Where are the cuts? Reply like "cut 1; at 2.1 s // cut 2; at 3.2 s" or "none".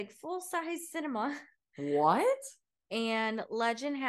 cut 1; at 2.9 s